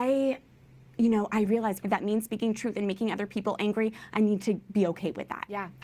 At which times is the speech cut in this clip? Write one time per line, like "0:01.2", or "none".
0:01.8